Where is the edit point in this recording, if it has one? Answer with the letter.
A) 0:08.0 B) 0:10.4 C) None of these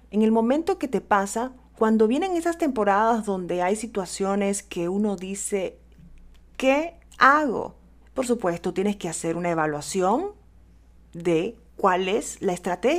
A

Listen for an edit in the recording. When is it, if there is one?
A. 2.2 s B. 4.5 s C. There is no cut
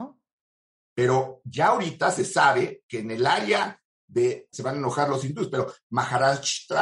B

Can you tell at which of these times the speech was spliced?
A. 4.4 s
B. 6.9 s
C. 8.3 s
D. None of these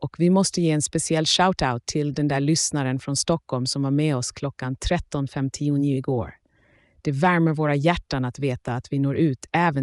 D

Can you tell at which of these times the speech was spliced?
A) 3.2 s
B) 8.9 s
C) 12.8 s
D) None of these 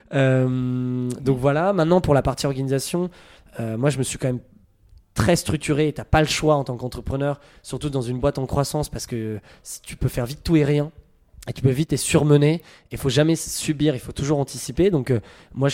D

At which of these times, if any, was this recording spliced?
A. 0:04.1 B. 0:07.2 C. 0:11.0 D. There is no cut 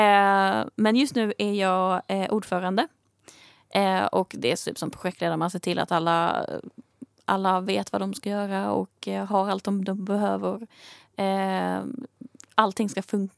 D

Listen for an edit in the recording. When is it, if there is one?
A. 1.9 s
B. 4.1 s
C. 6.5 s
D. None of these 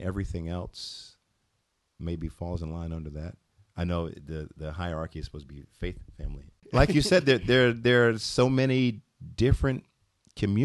C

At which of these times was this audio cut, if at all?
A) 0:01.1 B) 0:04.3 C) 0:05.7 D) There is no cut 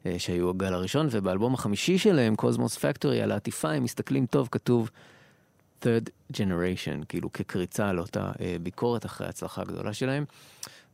B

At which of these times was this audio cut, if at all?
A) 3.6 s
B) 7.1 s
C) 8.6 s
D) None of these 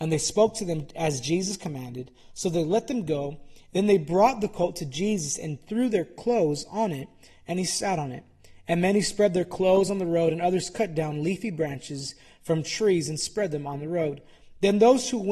D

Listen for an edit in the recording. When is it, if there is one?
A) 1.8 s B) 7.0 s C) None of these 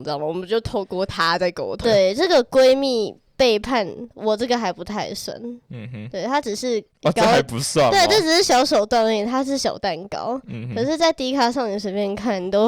A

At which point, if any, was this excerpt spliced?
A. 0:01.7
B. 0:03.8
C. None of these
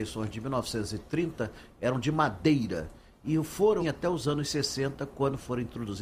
B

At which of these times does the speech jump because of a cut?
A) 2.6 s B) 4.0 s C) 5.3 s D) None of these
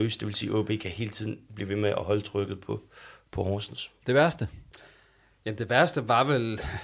D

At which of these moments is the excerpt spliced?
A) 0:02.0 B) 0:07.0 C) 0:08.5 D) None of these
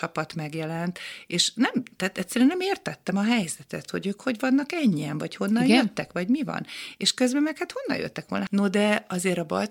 C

